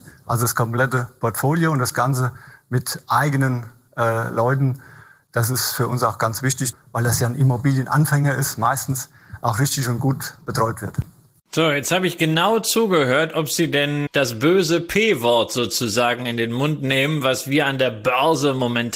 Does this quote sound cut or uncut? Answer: cut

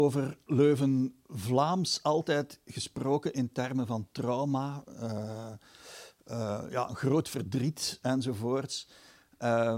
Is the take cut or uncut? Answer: uncut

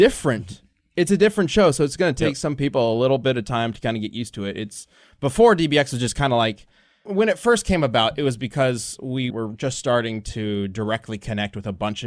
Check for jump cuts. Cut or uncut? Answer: cut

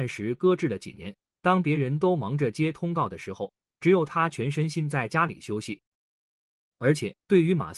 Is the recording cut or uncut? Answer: uncut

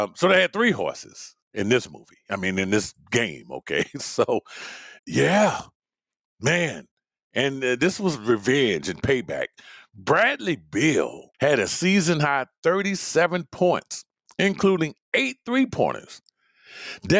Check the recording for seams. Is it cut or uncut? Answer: cut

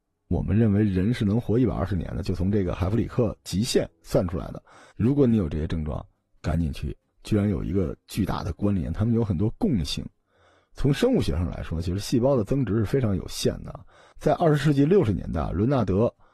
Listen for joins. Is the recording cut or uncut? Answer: cut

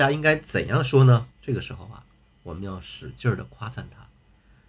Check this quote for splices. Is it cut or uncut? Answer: cut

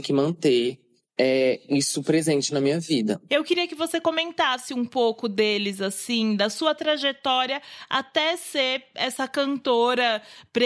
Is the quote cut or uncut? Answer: cut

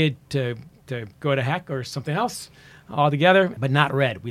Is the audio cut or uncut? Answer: uncut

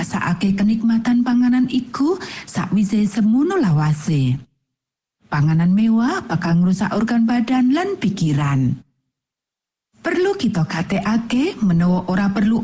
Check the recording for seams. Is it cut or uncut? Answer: cut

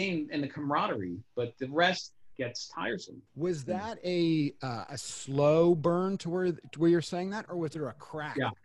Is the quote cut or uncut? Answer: cut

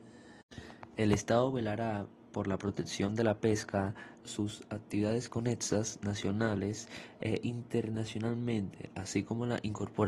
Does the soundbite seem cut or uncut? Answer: cut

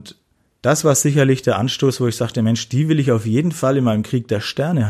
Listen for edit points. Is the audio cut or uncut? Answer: uncut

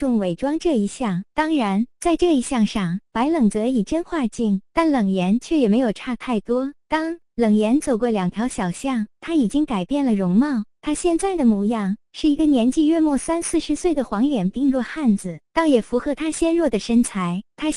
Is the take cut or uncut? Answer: uncut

